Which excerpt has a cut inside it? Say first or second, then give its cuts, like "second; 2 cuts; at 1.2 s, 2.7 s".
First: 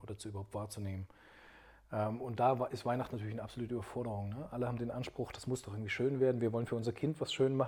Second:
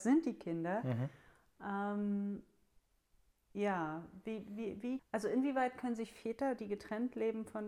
second; 1 cut; at 5.0 s